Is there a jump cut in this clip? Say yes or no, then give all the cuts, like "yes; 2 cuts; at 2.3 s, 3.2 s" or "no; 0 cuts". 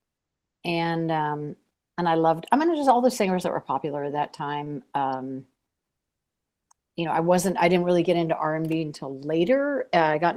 no; 0 cuts